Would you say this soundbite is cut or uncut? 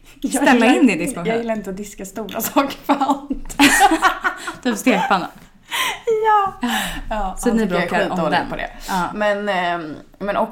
uncut